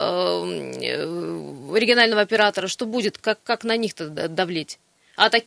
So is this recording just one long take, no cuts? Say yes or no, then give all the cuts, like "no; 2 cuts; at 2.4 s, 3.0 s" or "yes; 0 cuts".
yes; 0 cuts